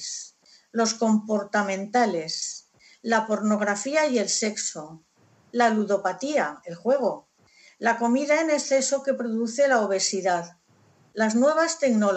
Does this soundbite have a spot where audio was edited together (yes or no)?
no